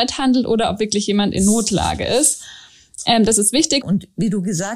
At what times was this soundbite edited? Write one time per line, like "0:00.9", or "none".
0:03.8